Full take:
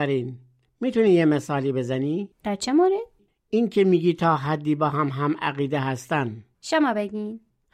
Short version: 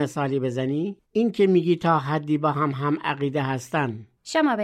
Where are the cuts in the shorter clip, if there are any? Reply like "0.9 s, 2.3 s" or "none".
1.0 s